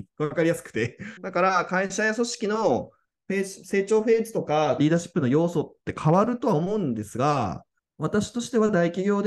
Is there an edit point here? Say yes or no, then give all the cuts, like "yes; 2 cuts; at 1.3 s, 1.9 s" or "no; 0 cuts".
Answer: yes; 3 cuts; at 1.2 s, 4.8 s, 7.8 s